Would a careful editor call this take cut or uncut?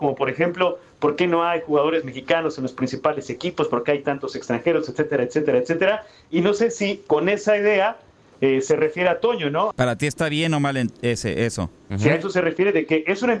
cut